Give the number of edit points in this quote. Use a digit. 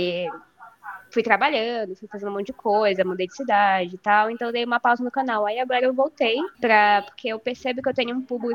1